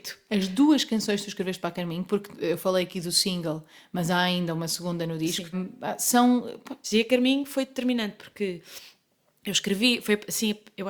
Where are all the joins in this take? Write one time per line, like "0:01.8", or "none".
0:05.5
0:06.8